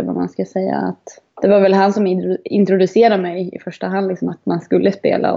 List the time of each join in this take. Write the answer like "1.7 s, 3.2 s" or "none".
1.3 s, 4.3 s